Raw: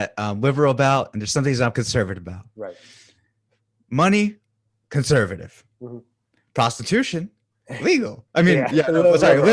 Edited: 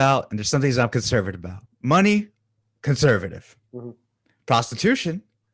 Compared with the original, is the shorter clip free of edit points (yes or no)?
no